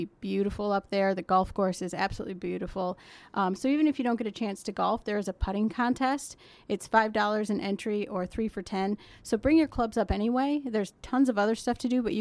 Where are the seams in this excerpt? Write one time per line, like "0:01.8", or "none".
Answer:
none